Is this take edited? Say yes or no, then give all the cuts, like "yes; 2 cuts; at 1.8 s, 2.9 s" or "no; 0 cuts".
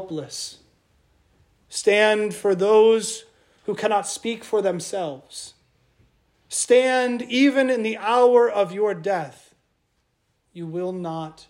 no; 0 cuts